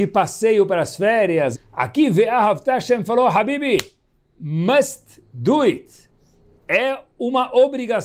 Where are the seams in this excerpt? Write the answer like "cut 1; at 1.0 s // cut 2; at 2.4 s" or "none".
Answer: cut 1; at 1.5 s